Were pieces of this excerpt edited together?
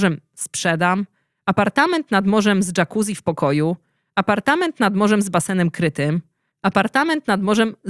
yes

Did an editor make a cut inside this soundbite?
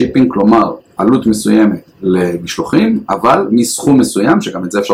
yes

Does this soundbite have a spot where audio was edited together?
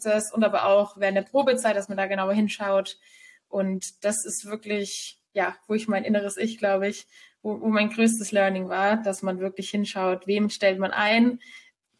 no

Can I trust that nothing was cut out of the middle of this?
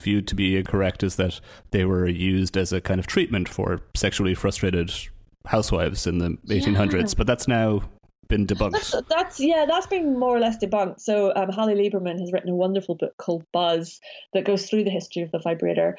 yes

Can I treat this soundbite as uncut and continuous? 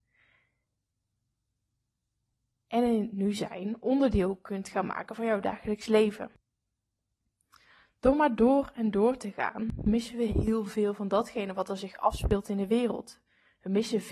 yes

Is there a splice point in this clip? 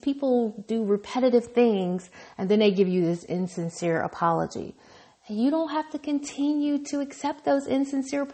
no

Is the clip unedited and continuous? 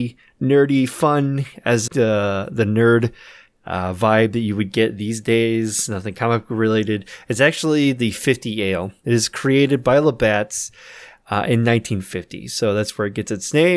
no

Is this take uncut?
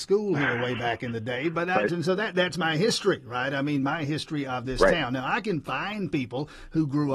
no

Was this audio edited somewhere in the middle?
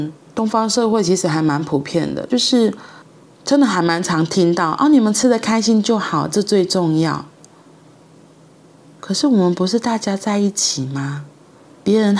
no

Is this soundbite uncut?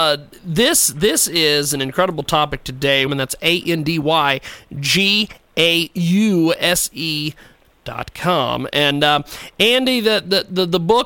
no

